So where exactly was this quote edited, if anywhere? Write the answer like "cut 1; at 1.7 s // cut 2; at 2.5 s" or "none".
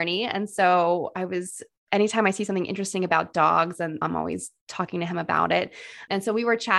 cut 1; at 4.0 s